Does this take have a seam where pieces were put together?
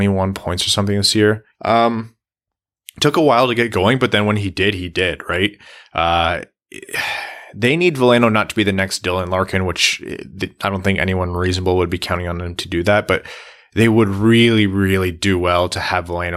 yes; 1 cut; at 1.5 s

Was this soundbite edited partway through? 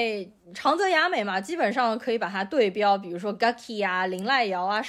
no; 0 cuts

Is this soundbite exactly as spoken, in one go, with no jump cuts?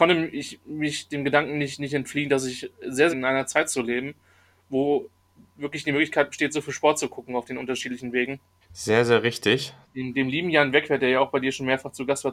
no; 3 cuts; at 3.1 s, 8.6 s, 9.8 s

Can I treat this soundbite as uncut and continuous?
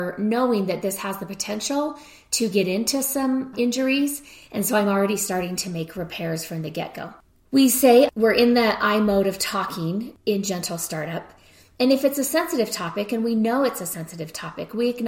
yes; 0 cuts

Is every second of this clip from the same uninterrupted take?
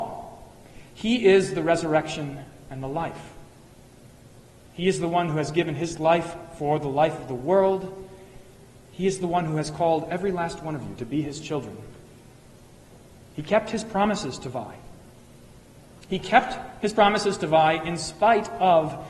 yes; 0 cuts

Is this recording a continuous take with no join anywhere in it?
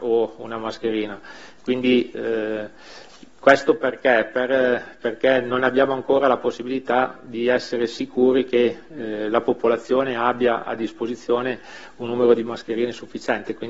yes; 0 cuts

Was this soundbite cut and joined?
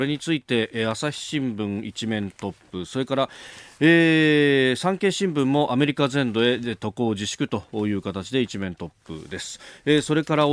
no; 0 cuts

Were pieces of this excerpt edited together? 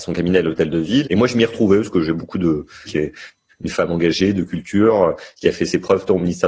yes; 2 cuts; at 1.0 s, 2.9 s

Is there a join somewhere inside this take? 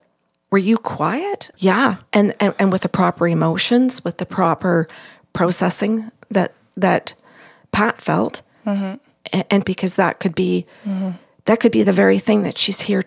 yes; 2 cuts; at 1.5 s, 9.6 s

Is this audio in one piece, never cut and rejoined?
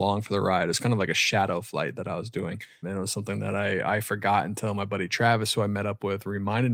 no; 1 cut; at 2.8 s

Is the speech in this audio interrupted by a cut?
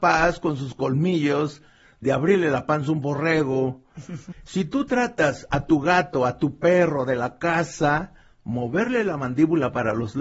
yes; 1 cut; at 4.3 s

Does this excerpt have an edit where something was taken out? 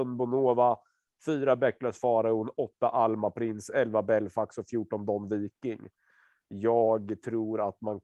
no; 0 cuts

